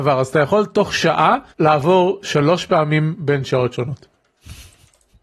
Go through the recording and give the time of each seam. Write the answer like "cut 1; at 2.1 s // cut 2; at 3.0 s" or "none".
cut 1; at 1.5 s

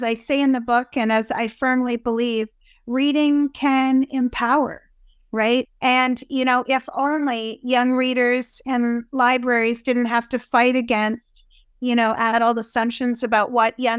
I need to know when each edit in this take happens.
cut 1; at 5.6 s

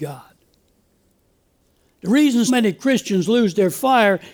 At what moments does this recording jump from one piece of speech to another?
cut 1; at 2.5 s

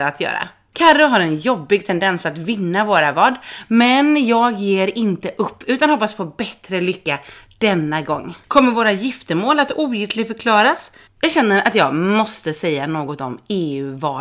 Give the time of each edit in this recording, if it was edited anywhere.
cut 1; at 8.4 s // cut 2; at 11.1 s

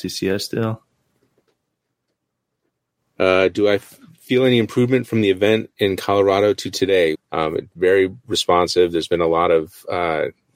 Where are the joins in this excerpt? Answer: cut 1; at 7.1 s

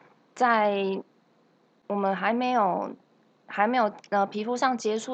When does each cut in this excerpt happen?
none

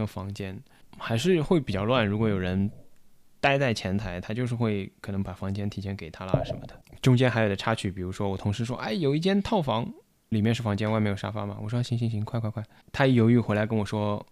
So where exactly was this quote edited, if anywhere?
none

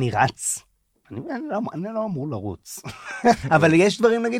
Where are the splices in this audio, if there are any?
cut 1; at 3.4 s

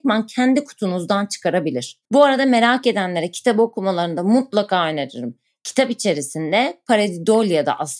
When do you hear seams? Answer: cut 1; at 2.1 s

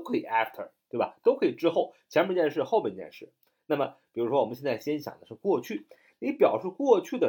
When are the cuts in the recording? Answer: none

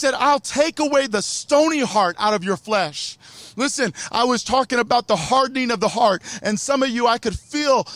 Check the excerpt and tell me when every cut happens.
none

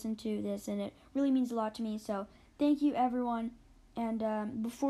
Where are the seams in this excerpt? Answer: none

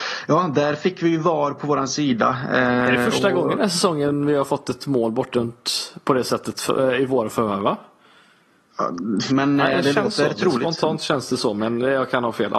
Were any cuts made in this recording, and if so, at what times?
cut 1; at 9.3 s

